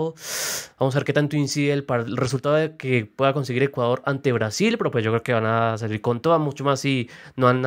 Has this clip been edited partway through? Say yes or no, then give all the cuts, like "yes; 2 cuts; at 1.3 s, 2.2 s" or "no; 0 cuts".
no; 0 cuts